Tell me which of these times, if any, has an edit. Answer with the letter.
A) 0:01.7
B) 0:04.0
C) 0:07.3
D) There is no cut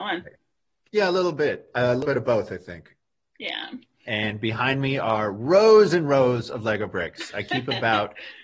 B